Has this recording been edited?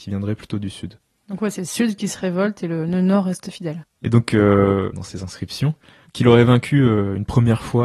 yes; 2 cuts; at 3.8 s, 4.9 s

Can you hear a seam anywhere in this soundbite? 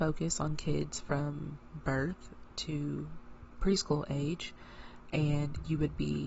no; 0 cuts

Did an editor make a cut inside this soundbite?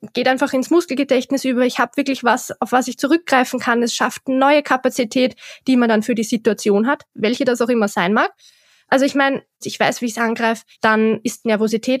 yes; 2 cuts; at 9.6 s, 10.7 s

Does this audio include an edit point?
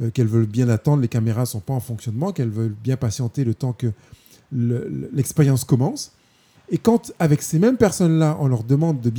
yes; 1 cut; at 6.5 s

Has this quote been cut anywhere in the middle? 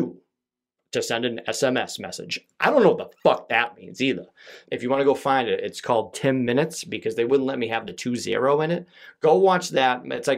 yes; 1 cut; at 4.6 s

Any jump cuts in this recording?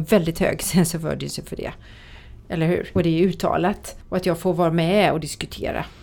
yes; 2 cuts; at 3.0 s, 4.0 s

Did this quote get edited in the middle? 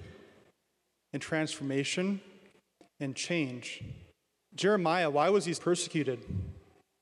yes; 2 cuts; at 4.4 s, 5.5 s

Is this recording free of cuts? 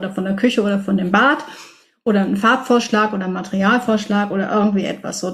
yes; 0 cuts

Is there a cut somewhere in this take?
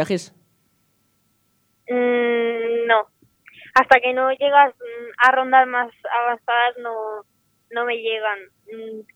no; 0 cuts

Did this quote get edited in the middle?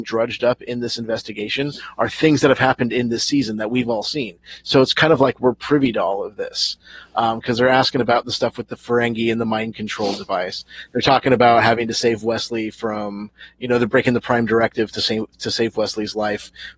no; 0 cuts

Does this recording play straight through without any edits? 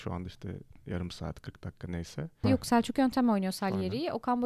no; 1 cut; at 2.4 s

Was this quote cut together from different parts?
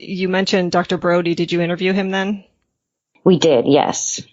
no; 0 cuts

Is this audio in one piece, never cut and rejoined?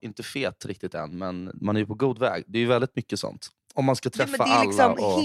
yes; 0 cuts

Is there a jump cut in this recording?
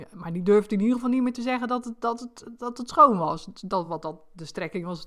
no; 0 cuts

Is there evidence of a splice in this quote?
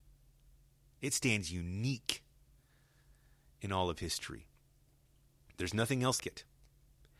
yes; 1 cut; at 6.2 s

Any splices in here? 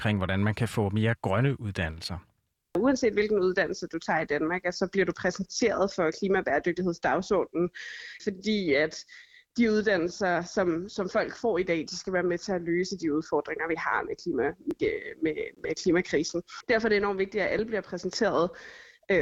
no; 0 cuts

